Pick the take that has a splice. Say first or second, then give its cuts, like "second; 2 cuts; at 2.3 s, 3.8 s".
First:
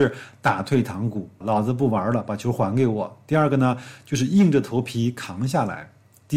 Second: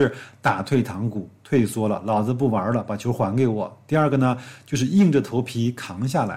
first; 1 cut; at 1.4 s